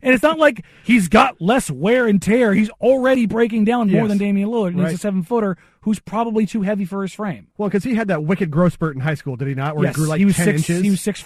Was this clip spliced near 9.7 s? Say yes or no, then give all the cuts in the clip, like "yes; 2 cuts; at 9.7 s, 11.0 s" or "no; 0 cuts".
no; 1 cut; at 7.5 s